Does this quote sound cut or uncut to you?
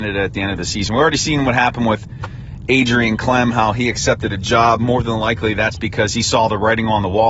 uncut